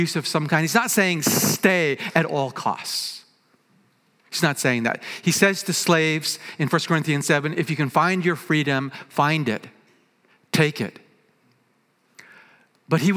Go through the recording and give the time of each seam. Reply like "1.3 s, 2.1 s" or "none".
none